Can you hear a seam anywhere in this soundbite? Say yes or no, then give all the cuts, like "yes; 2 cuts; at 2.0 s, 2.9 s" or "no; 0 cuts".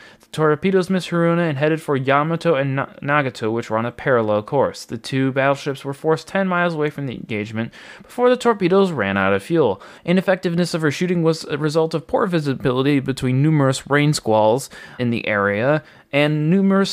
yes; 2 cuts; at 10.0 s, 15.0 s